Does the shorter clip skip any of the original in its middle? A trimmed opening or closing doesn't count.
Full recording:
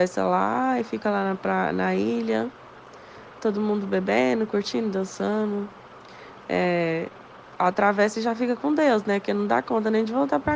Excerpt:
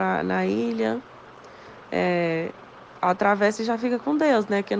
yes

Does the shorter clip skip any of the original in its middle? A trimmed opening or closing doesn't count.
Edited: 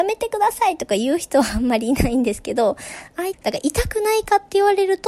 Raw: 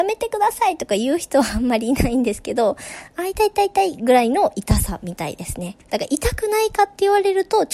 yes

